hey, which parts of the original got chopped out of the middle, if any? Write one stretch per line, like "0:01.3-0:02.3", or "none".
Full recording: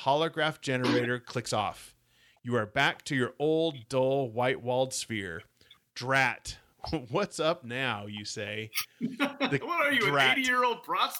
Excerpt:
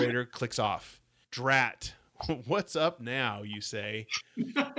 0:02.2-0:05.9

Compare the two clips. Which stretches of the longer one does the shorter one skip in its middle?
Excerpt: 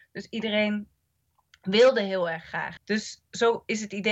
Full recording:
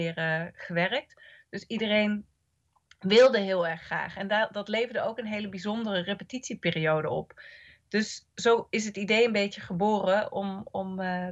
0:04.1-0:07.8

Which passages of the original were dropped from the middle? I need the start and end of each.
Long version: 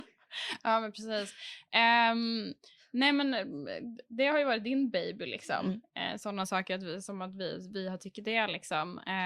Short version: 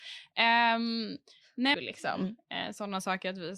0:03.1-0:05.2

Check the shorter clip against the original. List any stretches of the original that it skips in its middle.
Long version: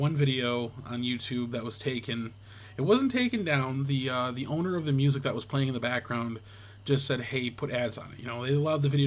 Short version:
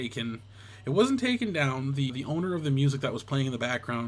0:04.0-0:04.3

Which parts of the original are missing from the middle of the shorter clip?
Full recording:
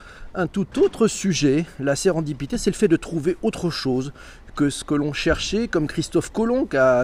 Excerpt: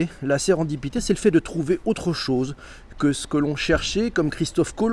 none

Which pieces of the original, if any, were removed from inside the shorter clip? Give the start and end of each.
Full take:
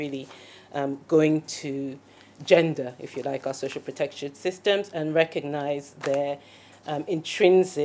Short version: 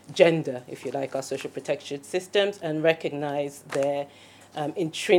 none

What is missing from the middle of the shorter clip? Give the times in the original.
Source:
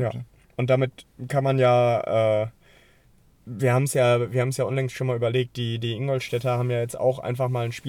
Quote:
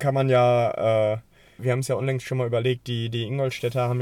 0:02.9-0:04.3

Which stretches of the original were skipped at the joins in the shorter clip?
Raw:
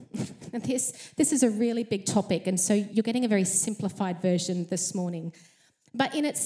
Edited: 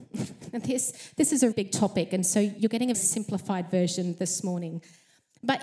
0:01.5-0:01.9
0:03.3-0:03.5

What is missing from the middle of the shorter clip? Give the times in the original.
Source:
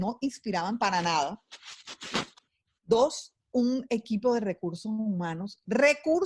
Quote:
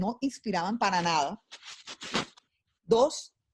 none

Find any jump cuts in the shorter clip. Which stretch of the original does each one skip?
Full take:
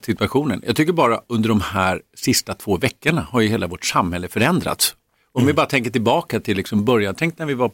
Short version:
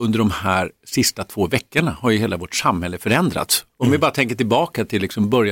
0:05.0-0:05.3

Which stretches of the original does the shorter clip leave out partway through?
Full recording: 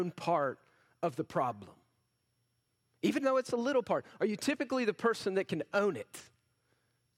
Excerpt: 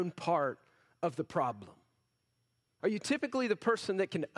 0:02.8-0:04.2

